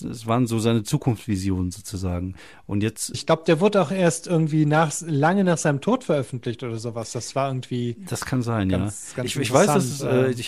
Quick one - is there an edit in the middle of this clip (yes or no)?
yes